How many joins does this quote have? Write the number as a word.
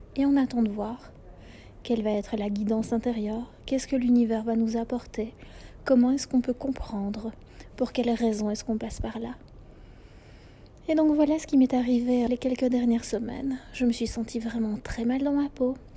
one